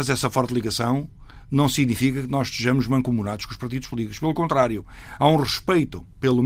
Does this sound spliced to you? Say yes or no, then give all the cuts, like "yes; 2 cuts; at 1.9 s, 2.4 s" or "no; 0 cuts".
no; 0 cuts